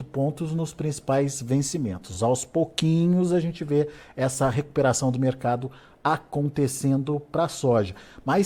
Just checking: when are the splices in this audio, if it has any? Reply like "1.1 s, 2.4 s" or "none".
none